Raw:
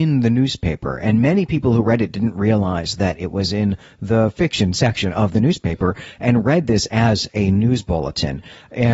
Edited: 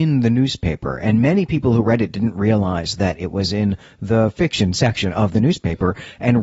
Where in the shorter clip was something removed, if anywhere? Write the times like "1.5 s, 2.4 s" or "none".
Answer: none

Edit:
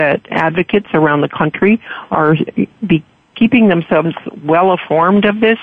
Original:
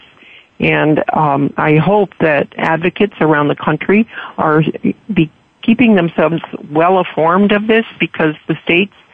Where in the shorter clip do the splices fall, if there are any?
none

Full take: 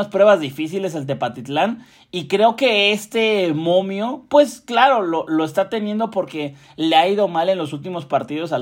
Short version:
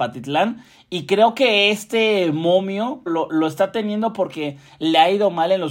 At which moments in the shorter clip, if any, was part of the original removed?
3.1 s

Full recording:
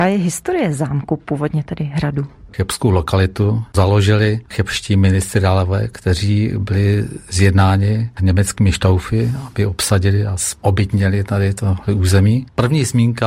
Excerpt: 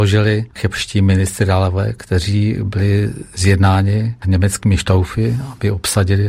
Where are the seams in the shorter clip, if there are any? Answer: none

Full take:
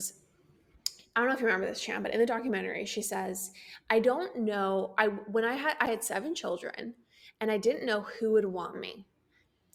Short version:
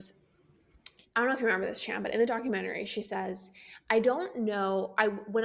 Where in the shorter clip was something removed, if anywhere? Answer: none

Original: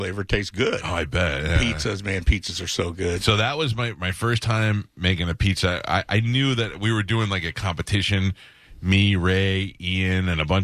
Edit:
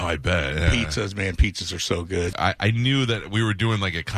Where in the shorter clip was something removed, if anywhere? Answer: 2.3 s

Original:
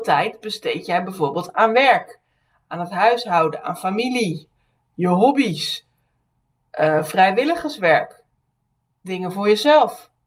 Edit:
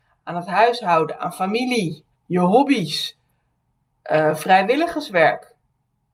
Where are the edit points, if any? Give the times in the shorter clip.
2.1 s

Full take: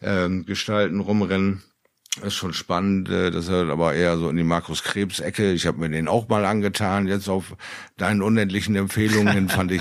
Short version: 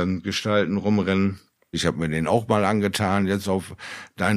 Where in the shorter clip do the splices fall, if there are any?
1.7 s

